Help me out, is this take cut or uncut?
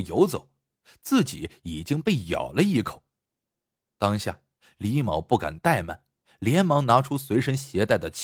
uncut